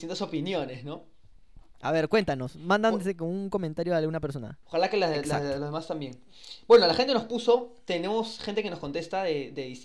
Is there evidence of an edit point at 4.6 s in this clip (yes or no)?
yes